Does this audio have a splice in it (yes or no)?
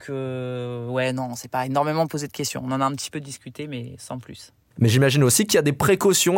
yes